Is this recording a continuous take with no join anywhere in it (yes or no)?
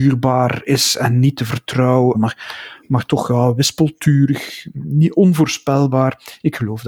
no